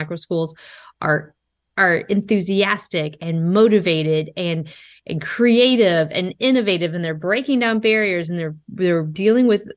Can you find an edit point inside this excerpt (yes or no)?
no